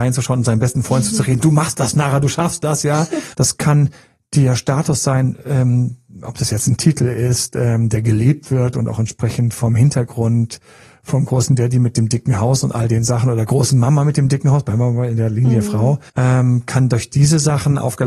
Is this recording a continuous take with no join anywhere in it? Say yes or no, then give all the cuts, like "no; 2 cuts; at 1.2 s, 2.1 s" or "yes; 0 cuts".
no; 2 cuts; at 3.3 s, 16.1 s